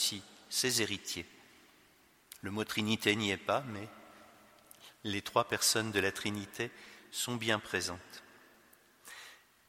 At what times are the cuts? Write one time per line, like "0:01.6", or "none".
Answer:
0:02.4